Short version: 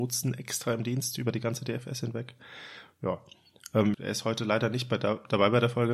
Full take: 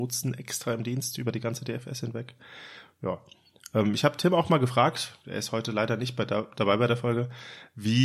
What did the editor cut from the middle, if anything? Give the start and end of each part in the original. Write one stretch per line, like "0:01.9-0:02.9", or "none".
0:03.9-0:05.2